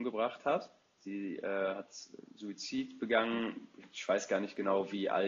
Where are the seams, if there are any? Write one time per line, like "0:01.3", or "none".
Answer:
none